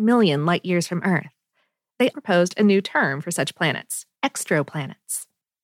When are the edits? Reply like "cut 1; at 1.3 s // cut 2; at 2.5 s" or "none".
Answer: cut 1; at 2.1 s // cut 2; at 4.1 s